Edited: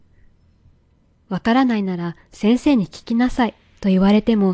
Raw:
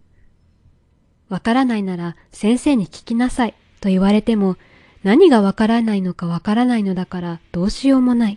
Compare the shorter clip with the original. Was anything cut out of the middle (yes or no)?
no